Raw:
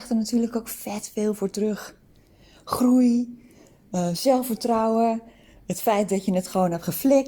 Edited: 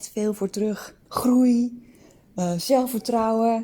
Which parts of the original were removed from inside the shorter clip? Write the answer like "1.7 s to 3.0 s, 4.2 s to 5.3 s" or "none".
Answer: 2.1 s to 2.6 s